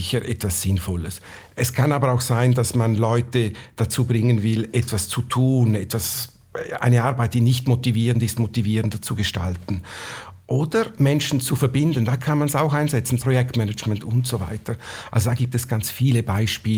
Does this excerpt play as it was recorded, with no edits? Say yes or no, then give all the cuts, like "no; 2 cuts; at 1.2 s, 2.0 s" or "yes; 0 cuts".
no; 3 cuts; at 10.9 s, 13.2 s, 15.7 s